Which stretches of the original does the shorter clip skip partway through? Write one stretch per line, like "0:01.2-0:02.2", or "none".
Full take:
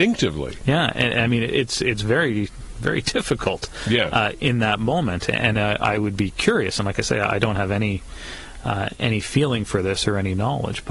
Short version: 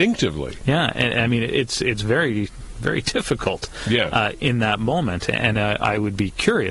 none